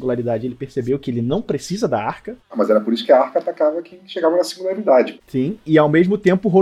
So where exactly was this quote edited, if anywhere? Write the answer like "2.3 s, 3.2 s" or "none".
none